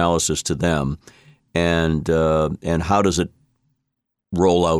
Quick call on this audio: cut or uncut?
uncut